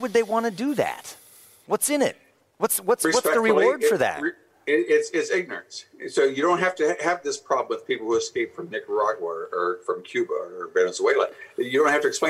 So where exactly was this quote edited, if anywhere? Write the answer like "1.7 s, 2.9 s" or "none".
none